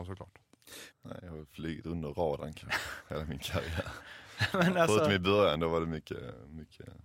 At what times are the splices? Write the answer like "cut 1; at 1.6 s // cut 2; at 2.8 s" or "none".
cut 1; at 0.9 s